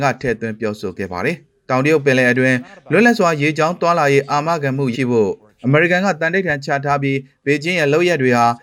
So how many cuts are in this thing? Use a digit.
1